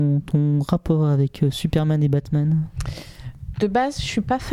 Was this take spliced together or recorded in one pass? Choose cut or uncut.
cut